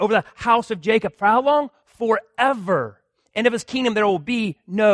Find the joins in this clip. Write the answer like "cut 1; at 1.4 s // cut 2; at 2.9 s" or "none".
none